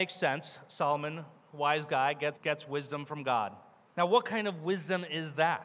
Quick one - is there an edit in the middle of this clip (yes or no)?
yes